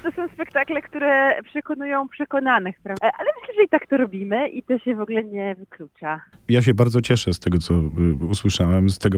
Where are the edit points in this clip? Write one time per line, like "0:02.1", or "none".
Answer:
0:03.0